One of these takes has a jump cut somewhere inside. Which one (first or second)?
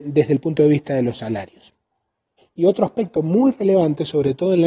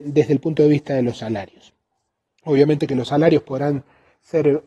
first